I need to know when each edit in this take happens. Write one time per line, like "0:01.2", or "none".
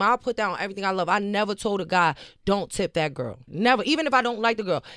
0:03.5